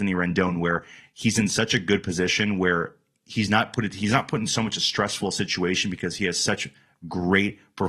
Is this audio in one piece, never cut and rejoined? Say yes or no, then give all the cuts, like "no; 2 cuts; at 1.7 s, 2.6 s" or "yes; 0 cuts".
yes; 0 cuts